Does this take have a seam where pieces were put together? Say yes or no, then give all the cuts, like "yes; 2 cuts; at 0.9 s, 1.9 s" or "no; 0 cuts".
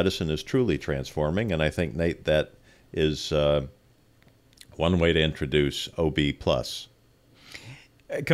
no; 0 cuts